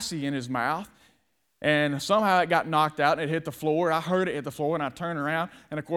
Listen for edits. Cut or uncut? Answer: uncut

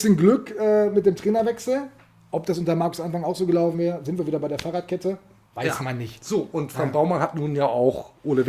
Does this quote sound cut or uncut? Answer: uncut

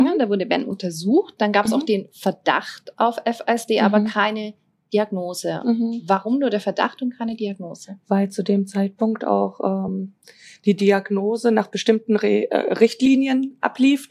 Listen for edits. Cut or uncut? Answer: uncut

